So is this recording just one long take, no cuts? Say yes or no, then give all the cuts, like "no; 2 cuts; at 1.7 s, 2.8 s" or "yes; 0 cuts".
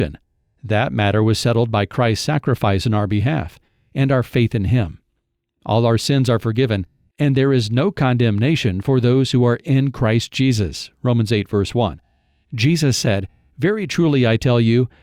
yes; 0 cuts